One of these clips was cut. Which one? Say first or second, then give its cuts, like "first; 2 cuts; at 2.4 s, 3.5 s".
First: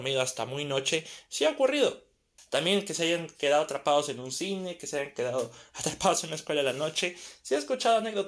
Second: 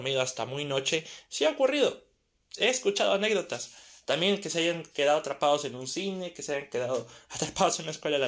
first; 1 cut; at 2.4 s